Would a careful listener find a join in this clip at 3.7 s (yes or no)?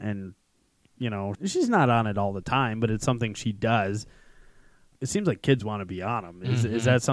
no